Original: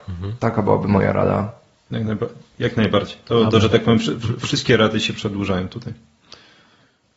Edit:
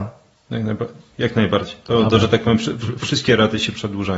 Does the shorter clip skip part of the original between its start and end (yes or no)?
no